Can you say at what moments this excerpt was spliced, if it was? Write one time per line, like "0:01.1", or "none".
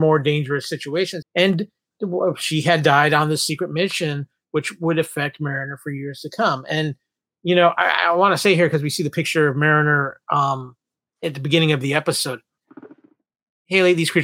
0:01.2